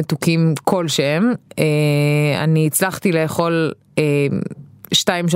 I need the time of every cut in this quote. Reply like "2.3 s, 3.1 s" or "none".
none